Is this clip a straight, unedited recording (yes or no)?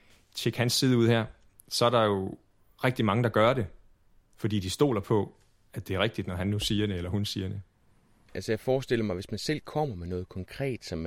no